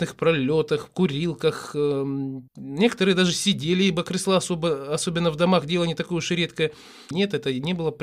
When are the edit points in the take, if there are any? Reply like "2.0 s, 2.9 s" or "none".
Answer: 2.5 s, 7.1 s